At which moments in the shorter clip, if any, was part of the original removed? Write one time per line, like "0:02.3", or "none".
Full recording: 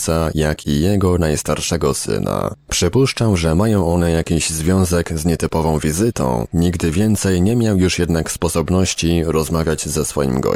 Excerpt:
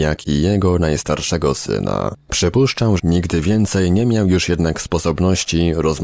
0:03.0